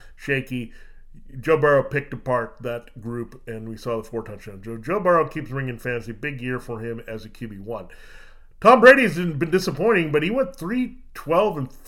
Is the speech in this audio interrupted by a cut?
no; 0 cuts

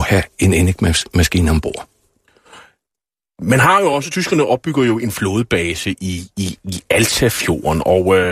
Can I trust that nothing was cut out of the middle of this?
yes; 0 cuts

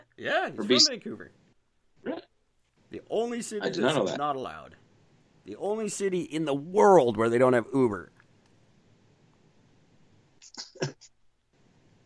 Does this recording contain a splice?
no; 0 cuts

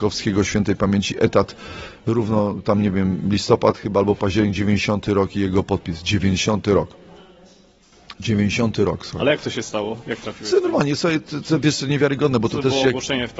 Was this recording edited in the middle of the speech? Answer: no; 0 cuts

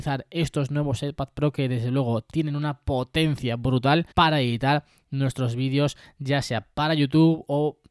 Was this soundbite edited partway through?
yes; 1 cut; at 4.1 s

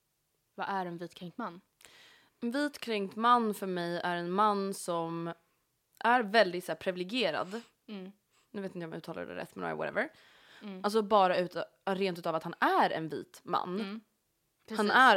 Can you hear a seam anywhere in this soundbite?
yes; 1 cut; at 10.6 s

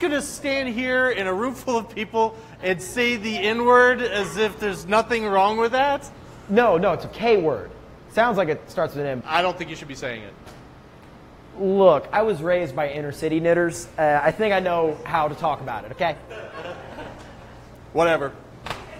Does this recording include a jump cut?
yes; 1 cut; at 9.2 s

